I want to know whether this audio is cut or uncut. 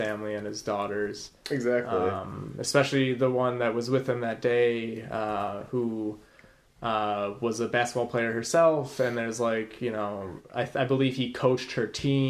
uncut